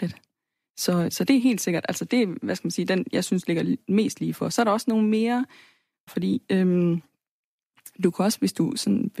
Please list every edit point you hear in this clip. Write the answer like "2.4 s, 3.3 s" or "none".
6.1 s